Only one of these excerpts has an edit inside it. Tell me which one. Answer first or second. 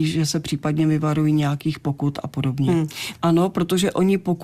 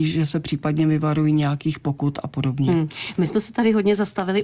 first